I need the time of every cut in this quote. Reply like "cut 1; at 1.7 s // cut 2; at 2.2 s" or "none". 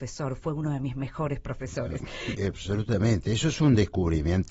cut 1; at 2.4 s